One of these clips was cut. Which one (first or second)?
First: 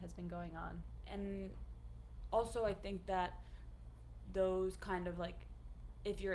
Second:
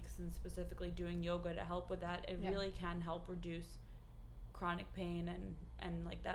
first